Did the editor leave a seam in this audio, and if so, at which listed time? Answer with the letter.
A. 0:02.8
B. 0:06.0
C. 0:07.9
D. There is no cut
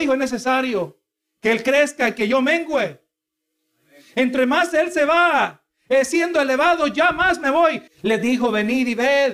C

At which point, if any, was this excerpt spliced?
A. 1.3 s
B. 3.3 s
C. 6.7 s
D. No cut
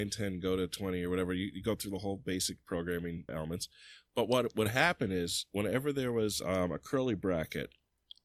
B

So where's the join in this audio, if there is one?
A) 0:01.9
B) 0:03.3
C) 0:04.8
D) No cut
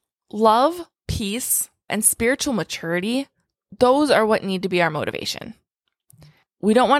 A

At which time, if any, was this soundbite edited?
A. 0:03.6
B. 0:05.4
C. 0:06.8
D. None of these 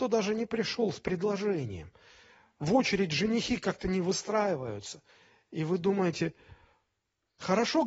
D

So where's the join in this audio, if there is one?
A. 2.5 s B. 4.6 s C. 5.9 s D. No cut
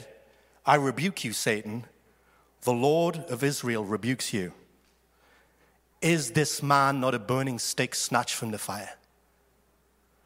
D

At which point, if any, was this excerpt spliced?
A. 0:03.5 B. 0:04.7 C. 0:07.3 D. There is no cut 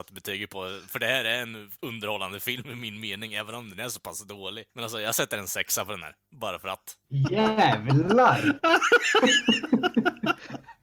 B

